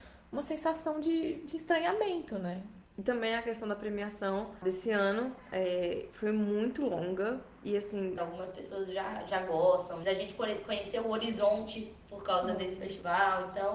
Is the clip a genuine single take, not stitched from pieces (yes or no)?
no